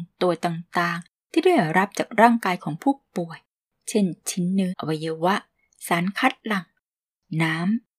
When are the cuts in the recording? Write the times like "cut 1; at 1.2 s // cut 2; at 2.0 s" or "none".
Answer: cut 1; at 4.7 s